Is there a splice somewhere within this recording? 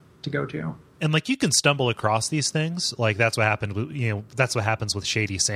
no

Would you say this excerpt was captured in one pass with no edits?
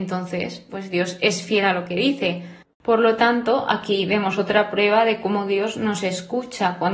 no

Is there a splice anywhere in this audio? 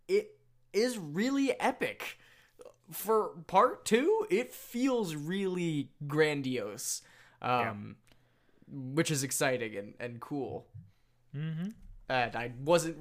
no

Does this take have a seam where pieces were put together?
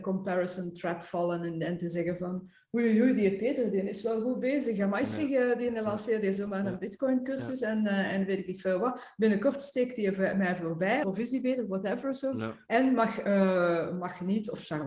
yes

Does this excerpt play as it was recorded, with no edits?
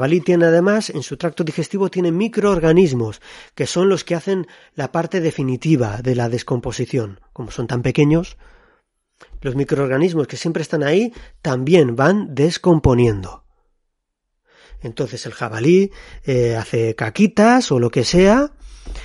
yes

